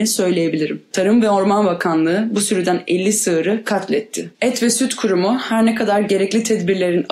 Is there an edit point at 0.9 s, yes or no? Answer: yes